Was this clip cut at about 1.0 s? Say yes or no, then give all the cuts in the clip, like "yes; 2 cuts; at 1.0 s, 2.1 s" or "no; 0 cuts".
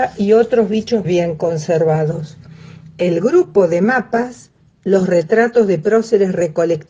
yes; 1 cut; at 1.0 s